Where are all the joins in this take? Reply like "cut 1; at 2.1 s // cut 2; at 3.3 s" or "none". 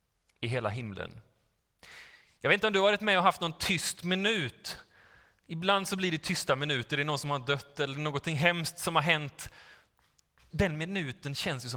cut 1; at 10.5 s